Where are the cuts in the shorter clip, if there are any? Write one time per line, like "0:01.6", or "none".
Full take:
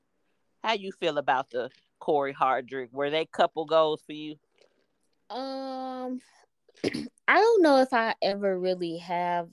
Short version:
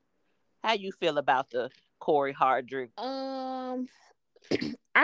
0:02.9